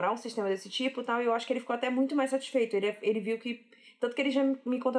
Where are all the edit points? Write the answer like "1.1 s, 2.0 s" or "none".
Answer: none